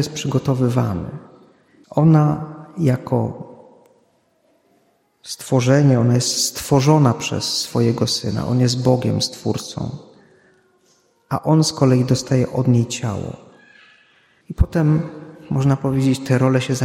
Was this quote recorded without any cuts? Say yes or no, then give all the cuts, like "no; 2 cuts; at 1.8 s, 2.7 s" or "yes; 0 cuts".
no; 2 cuts; at 1.8 s, 14.4 s